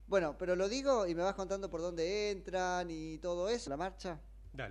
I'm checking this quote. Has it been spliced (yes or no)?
yes